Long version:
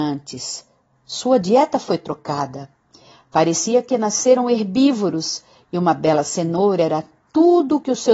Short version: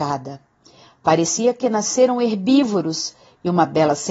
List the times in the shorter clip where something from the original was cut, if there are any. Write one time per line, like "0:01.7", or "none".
none

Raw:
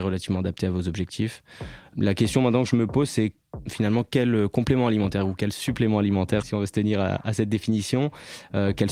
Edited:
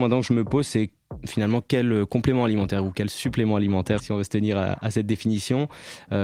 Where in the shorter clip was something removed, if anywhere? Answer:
none

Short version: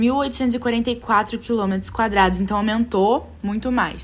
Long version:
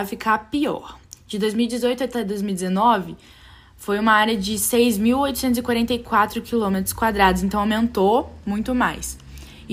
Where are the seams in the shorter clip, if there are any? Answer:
none

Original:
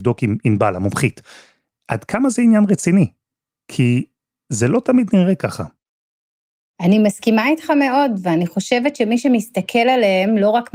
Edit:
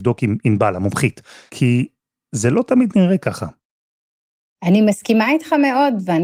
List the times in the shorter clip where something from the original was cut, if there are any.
0:01.5

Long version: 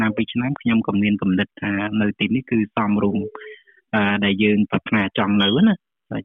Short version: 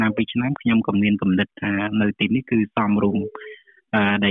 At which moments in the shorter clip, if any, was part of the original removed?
none

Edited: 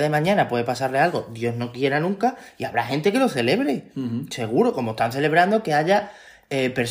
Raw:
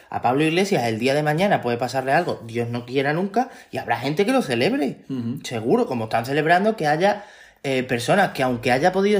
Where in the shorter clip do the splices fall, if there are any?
none

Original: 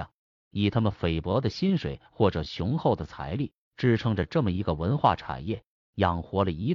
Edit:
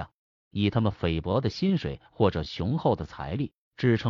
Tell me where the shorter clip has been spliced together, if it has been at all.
none

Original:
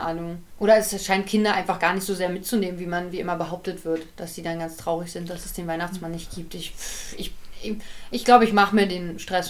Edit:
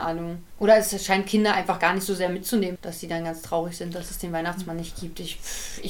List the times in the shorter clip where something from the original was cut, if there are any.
0:02.8

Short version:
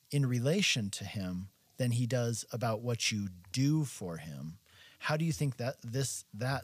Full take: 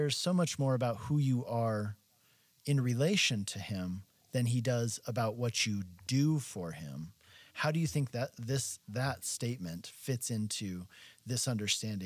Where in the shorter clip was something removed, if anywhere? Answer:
none

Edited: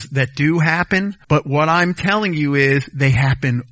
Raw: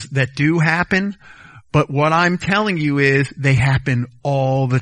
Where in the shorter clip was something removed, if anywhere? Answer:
0:01.2

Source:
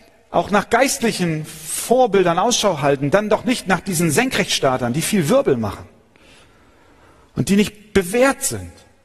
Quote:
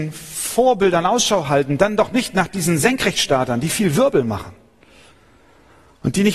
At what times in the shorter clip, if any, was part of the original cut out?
none

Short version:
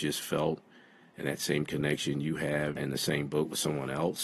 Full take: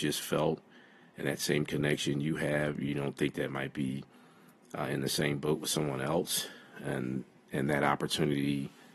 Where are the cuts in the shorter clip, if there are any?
0:02.8

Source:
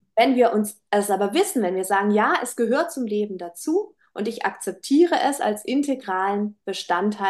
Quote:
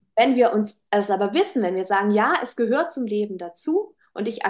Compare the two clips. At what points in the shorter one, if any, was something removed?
none

